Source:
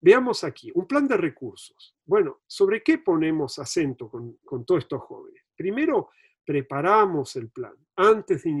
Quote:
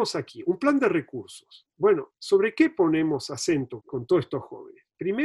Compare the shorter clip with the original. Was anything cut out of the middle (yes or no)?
yes